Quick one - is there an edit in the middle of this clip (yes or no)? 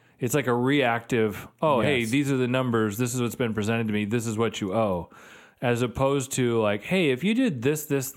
no